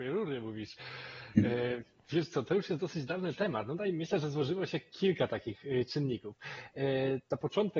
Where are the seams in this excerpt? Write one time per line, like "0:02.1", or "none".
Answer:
none